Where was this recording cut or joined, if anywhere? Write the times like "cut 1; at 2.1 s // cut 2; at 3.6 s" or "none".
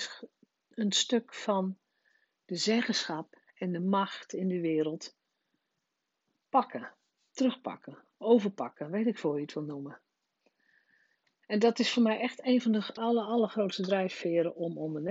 cut 1; at 13.0 s